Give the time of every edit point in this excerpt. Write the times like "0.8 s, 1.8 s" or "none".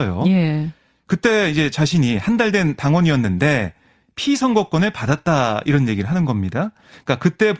none